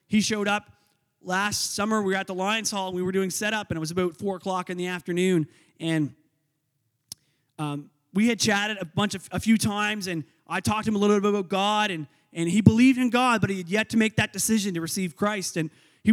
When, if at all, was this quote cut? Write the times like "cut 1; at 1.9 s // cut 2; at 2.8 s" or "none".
none